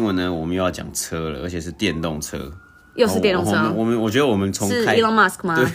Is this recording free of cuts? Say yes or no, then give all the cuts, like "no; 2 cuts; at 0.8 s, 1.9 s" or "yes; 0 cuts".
yes; 0 cuts